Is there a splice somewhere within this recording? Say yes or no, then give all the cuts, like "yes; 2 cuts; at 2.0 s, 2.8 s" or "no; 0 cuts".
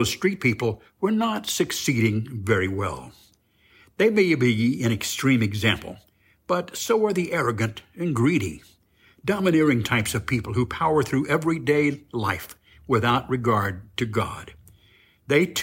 no; 0 cuts